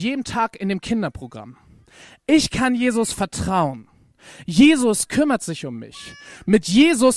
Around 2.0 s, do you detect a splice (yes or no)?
no